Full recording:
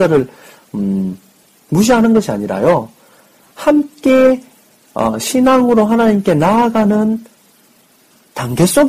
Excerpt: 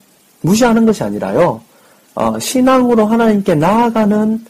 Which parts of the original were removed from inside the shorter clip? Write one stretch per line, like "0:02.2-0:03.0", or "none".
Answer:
0:03.3-0:04.8